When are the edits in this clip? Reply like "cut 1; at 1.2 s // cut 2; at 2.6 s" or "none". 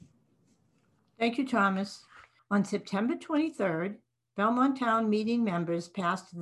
cut 1; at 2.4 s